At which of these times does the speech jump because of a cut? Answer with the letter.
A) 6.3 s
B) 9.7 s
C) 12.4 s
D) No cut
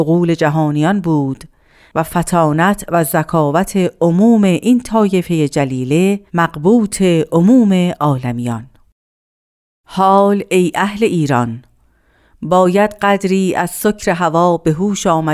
A